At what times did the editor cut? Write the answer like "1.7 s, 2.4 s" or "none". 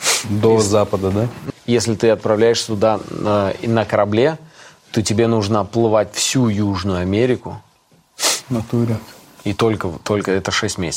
1.5 s